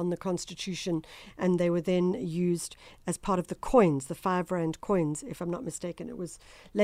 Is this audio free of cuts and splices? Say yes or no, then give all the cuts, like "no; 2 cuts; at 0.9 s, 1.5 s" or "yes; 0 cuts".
yes; 0 cuts